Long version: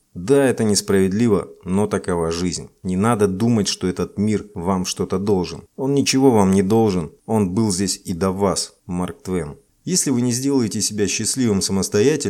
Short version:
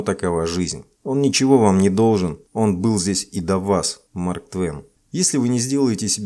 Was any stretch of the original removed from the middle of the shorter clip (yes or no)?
yes